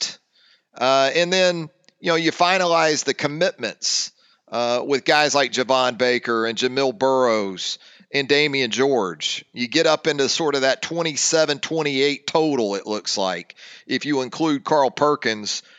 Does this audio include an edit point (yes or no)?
no